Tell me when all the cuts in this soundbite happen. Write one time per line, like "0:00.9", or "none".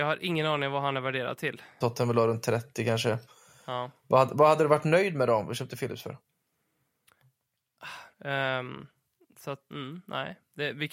0:01.8
0:08.1
0:09.7